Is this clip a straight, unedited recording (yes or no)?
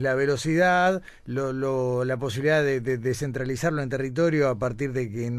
yes